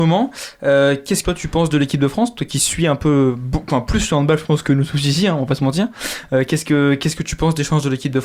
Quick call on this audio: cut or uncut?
cut